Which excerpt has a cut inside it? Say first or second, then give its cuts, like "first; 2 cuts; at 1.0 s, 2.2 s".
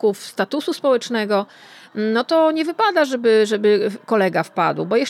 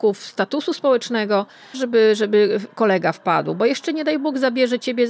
second; 1 cut; at 1.7 s